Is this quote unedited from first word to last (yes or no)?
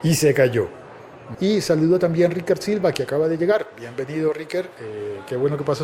no